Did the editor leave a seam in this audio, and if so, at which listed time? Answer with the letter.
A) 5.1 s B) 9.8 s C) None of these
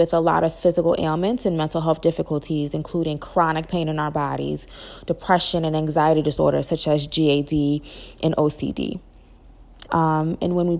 B